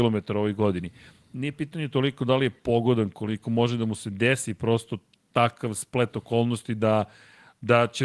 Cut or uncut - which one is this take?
uncut